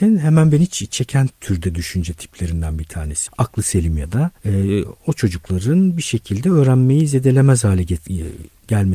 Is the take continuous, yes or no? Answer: no